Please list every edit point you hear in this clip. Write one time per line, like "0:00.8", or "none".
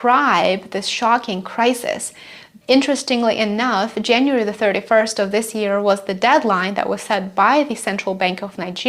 0:02.6